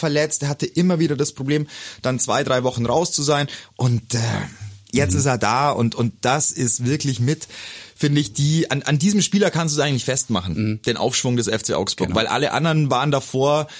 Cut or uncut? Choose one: uncut